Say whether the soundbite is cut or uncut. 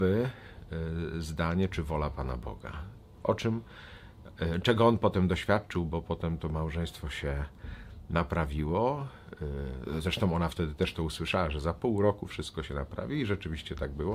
uncut